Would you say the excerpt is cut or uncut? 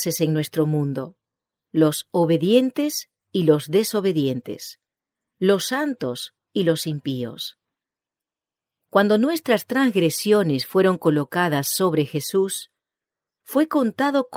uncut